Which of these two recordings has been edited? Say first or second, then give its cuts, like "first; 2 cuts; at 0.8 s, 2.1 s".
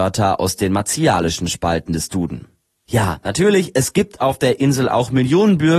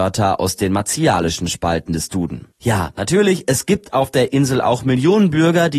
second; 1 cut; at 2.5 s